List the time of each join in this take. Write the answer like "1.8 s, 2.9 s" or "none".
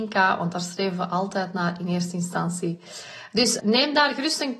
3.6 s